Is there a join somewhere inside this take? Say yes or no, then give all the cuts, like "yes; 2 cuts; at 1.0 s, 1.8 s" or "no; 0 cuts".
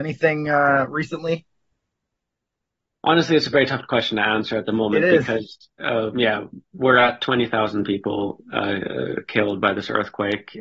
no; 0 cuts